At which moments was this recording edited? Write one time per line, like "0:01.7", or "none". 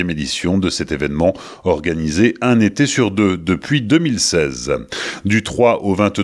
none